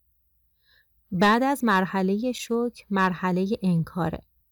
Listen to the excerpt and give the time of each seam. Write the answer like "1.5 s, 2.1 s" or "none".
0.9 s